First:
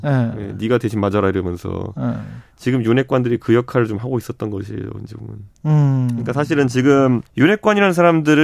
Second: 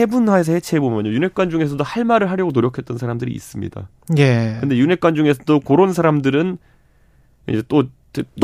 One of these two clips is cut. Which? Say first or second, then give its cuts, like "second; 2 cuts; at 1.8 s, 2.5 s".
first; 1 cut; at 7.3 s